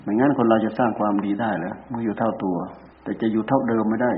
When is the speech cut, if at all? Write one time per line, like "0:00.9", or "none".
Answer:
0:02.9